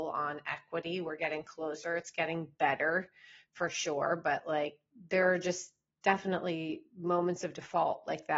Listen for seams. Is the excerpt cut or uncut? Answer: uncut